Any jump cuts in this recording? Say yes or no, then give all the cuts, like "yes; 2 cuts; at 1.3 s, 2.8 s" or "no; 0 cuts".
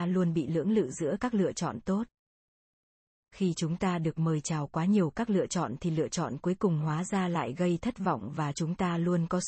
no; 0 cuts